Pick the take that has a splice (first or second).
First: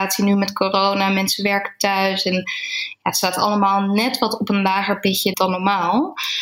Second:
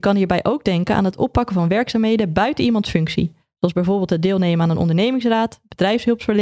first